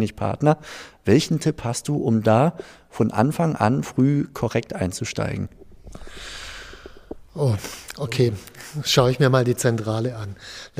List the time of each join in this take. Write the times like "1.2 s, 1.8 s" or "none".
none